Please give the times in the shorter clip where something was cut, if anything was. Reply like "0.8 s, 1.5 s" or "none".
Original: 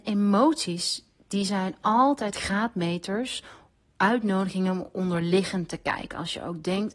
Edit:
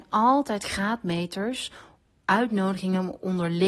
none